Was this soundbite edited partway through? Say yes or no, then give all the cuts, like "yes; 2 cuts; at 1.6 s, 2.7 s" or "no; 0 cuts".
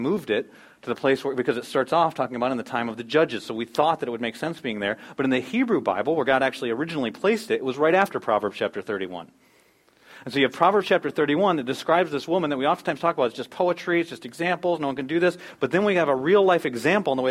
no; 0 cuts